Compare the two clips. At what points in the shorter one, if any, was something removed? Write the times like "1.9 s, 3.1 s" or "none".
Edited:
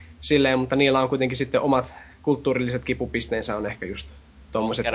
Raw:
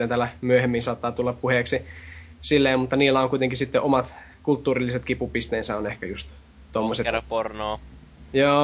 none